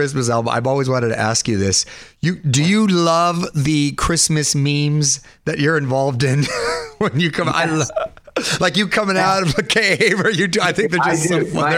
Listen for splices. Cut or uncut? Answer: uncut